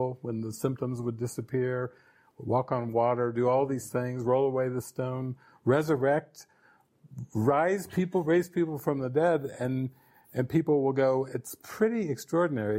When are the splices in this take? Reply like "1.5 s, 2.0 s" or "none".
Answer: none